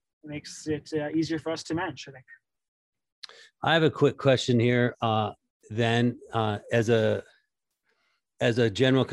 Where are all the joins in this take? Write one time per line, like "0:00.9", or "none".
none